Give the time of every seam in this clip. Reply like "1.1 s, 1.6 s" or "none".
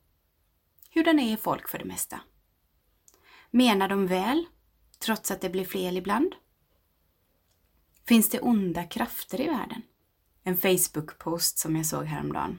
10.3 s